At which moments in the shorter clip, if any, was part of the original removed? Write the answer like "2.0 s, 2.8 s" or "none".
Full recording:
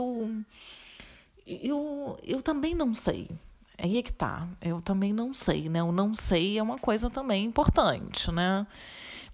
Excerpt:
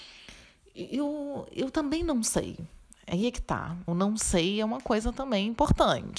3.9 s